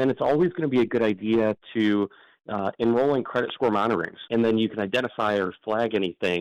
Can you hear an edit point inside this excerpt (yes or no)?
yes